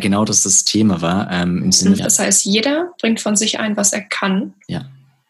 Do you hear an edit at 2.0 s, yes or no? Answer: yes